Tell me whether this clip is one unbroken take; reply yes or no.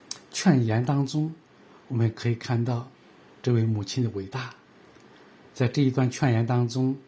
yes